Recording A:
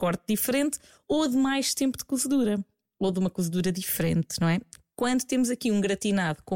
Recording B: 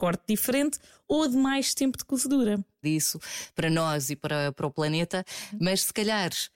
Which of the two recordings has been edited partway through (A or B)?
B